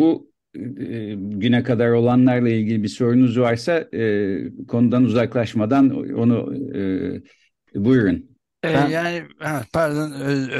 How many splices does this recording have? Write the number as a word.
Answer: zero